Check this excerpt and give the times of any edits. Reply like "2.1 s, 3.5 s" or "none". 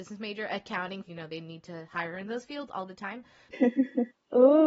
1.1 s, 3.5 s

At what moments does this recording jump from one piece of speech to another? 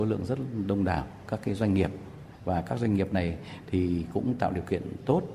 none

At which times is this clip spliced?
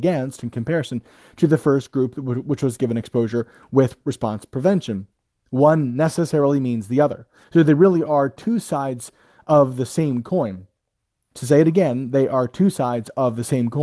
5.4 s, 7.4 s, 11.3 s

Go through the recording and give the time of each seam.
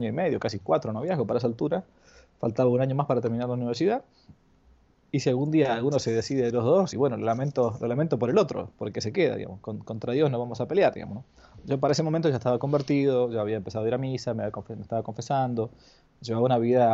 none

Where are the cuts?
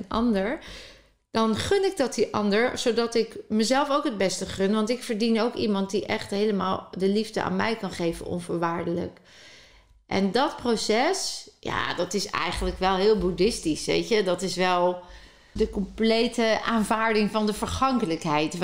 none

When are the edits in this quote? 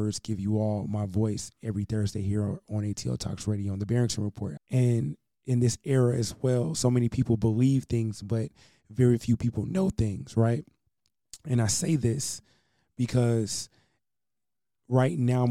4.6 s

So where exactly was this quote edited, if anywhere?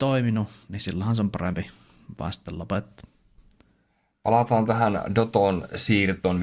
none

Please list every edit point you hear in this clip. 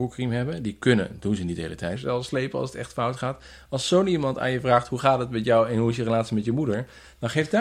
2.0 s

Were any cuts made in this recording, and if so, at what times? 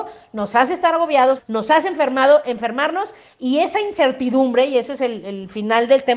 1.4 s

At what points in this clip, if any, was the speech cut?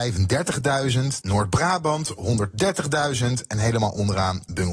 1.2 s

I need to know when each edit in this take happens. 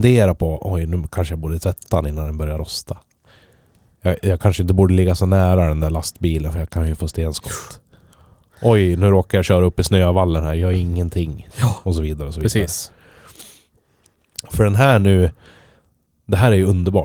11.5 s

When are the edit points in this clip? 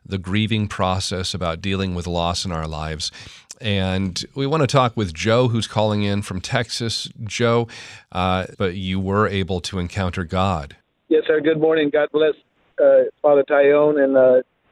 8.5 s

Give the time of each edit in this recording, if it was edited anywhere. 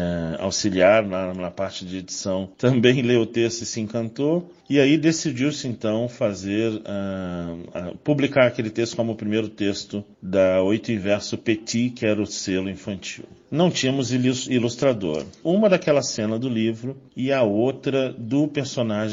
15.4 s

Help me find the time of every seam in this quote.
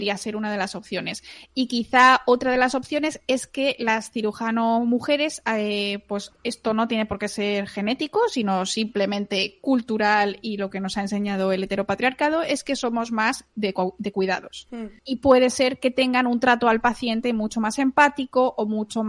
none

